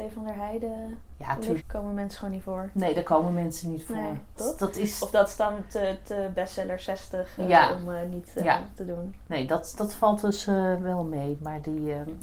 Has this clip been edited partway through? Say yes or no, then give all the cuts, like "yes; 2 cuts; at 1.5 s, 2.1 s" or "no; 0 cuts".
yes; 2 cuts; at 1.6 s, 4.4 s